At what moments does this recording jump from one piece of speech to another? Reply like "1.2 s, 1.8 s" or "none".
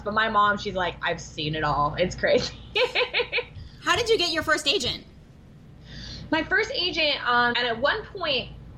7.5 s